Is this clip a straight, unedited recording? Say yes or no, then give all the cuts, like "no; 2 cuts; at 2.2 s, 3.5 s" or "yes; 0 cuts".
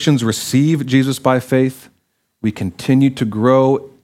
yes; 0 cuts